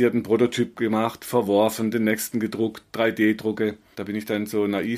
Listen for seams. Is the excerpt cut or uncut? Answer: cut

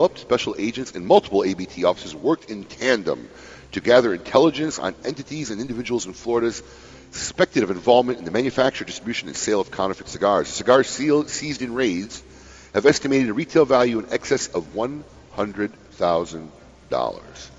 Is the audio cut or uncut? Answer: uncut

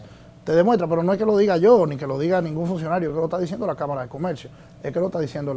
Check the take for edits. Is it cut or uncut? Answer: uncut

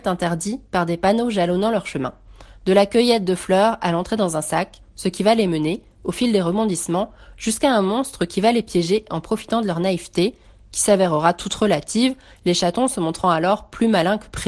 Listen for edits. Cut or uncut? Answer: uncut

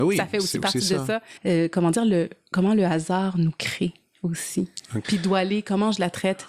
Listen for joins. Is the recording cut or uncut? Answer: cut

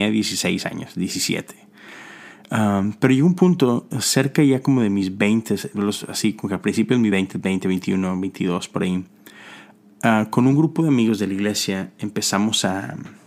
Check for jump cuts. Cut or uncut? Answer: uncut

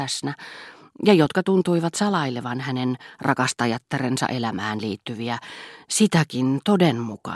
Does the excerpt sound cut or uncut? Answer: uncut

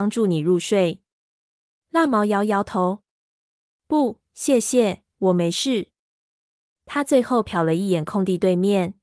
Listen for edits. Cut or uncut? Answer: uncut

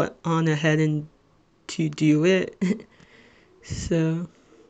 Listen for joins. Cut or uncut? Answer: uncut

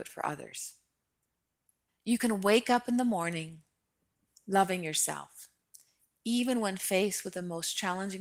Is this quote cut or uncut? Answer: cut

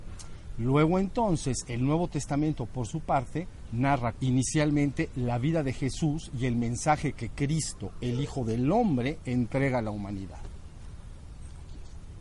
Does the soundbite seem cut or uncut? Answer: cut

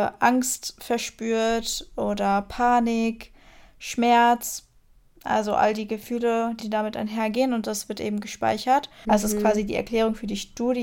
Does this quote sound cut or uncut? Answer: cut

